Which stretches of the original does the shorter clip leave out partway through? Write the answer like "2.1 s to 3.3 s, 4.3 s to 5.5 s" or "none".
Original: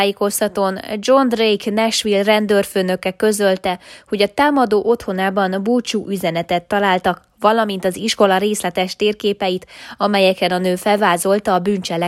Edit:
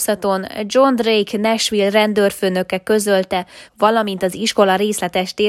4.0 s to 7.3 s